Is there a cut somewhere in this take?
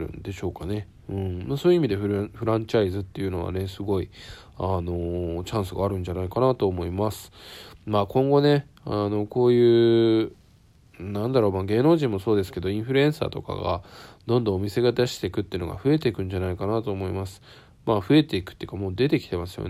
no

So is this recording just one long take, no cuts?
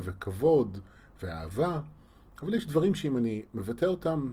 yes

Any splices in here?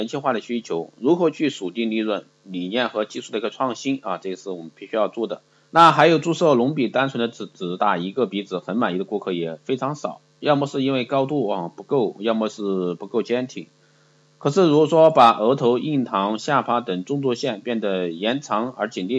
yes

